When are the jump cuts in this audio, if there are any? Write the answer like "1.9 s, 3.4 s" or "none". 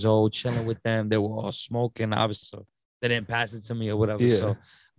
2.4 s